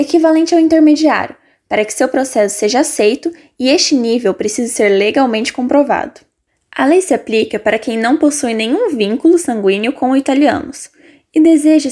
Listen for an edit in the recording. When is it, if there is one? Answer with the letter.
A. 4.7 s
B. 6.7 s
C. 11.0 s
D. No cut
D